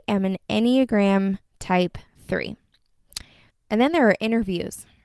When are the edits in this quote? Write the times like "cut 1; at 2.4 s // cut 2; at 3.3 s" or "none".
cut 1; at 3.5 s